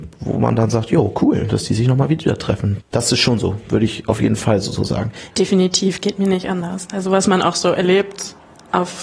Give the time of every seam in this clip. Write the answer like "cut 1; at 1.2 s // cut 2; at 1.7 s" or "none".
cut 1; at 2.8 s // cut 2; at 5.3 s